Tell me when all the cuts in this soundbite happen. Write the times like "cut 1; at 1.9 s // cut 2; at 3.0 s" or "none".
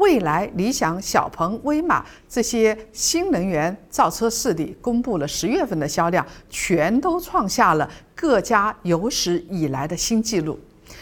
none